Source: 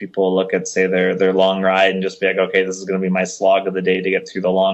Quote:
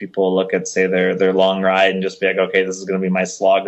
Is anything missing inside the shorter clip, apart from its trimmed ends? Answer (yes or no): no